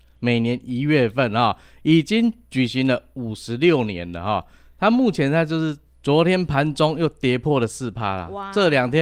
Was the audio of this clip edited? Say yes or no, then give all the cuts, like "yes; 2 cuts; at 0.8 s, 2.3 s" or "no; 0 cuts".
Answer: yes; 1 cut; at 5.9 s